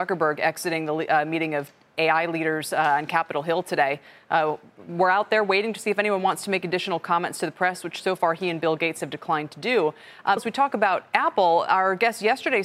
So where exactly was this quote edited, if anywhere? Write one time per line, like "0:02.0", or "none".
0:10.4